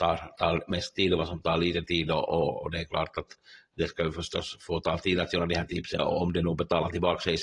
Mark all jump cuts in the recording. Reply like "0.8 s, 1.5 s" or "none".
6.0 s